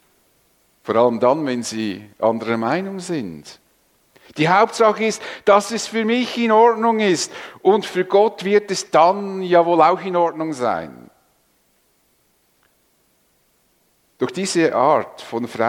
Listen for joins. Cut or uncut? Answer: uncut